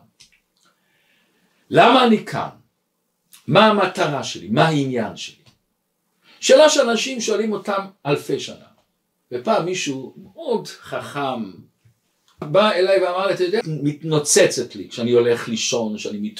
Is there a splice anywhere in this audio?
yes; 2 cuts; at 12.4 s, 13.6 s

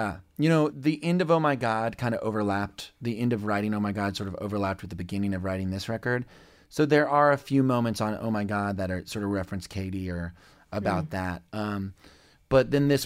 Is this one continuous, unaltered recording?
yes; 0 cuts

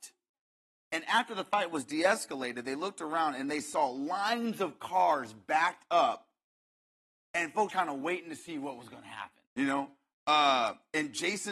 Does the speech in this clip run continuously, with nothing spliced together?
no; 2 cuts; at 7.7 s, 9.5 s

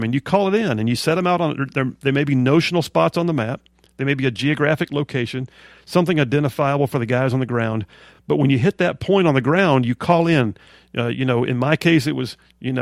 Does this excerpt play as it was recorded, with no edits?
yes; 0 cuts

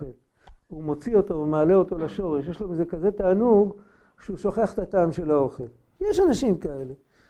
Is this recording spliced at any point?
no; 0 cuts

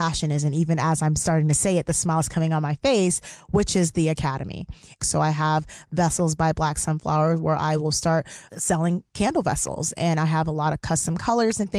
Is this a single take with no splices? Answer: no; 2 cuts; at 5.0 s, 8.5 s

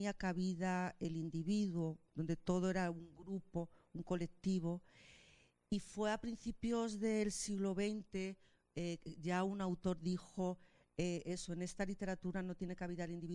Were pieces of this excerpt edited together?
no; 0 cuts

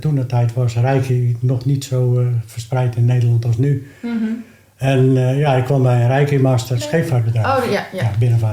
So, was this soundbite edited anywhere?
yes; 1 cut; at 6.7 s

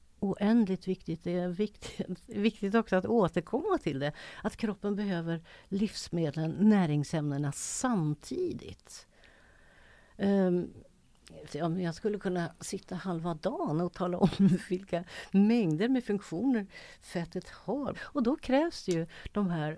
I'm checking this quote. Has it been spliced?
yes; 2 cuts; at 11.5 s, 17.9 s

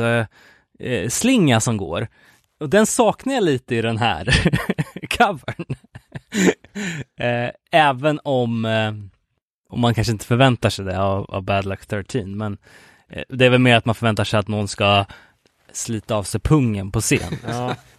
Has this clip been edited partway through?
no; 0 cuts

